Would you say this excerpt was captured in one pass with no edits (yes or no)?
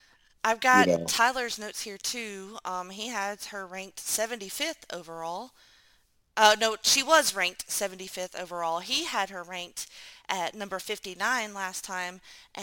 yes